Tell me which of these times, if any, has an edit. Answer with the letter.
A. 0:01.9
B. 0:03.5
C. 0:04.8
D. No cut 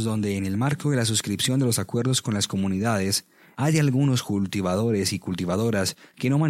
B